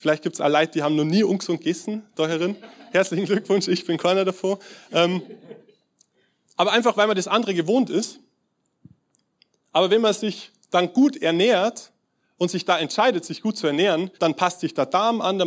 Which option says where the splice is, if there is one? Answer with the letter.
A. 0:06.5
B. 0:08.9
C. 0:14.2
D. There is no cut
C